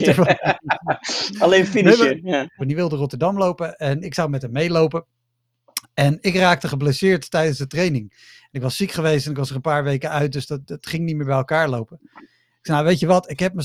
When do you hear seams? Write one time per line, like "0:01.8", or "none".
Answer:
0:02.6